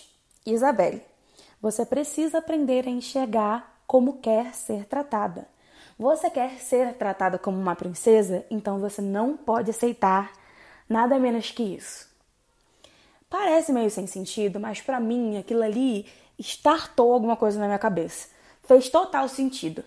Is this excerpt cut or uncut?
uncut